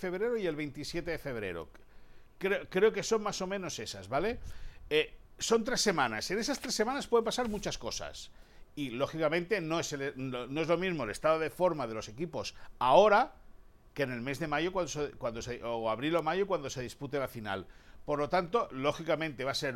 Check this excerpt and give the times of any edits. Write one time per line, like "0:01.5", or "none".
0:05.3